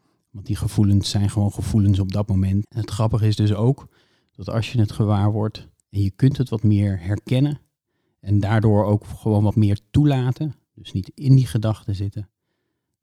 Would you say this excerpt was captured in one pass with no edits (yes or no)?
no